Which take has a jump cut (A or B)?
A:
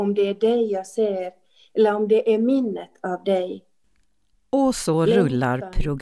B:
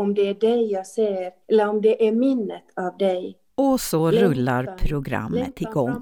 B